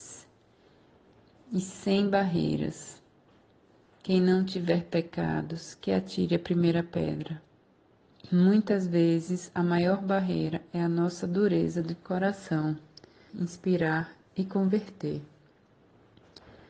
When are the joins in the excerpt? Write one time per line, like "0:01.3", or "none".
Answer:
0:08.1
0:13.3